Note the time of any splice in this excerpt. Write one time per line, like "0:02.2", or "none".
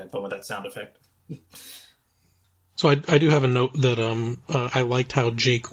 none